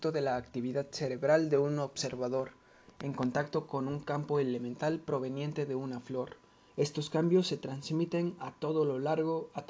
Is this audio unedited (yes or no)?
no